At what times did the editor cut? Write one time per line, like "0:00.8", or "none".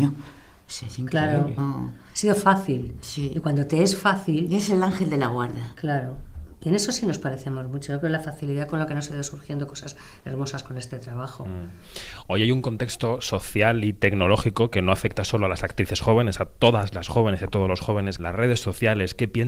0:01.6
0:18.2